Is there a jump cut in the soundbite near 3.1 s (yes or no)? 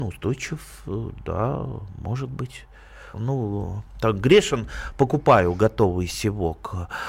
yes